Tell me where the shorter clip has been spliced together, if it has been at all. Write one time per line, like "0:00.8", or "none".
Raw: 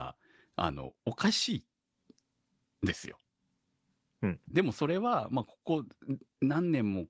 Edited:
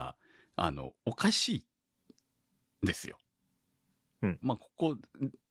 0:04.4